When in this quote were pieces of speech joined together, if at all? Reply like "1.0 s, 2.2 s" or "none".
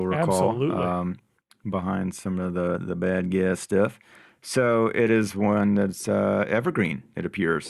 none